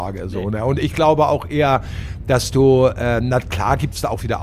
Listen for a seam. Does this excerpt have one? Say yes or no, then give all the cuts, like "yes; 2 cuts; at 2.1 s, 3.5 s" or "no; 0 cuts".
no; 0 cuts